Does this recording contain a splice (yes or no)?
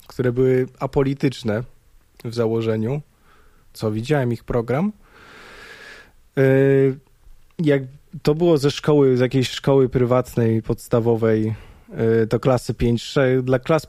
yes